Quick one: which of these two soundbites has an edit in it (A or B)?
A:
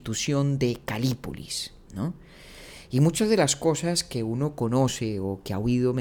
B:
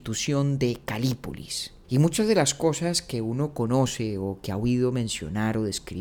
B